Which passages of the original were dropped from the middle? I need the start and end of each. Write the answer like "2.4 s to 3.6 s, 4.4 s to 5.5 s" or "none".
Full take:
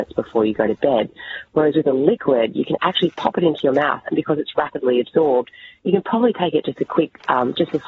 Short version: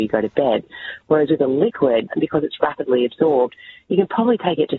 2.5 s to 4.0 s